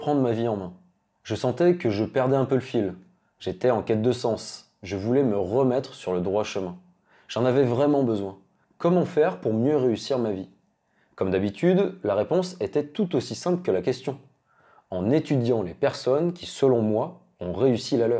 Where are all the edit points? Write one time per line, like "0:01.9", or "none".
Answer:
0:08.6